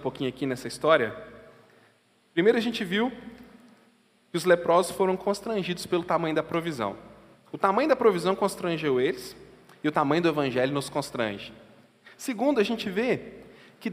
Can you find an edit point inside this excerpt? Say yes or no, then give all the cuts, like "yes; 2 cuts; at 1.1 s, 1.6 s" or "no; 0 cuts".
no; 0 cuts